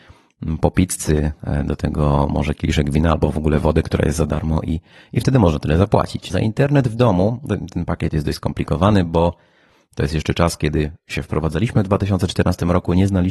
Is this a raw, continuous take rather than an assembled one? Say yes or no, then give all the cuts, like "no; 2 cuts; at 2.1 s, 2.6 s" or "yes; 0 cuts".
no; 1 cut; at 6.3 s